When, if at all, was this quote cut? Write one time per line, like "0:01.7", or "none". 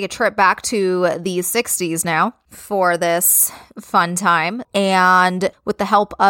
0:04.6